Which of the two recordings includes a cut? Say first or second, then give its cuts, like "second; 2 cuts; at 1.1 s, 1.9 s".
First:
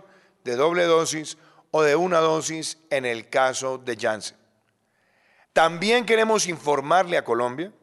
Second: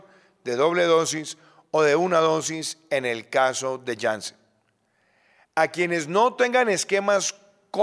first; 1 cut; at 5.5 s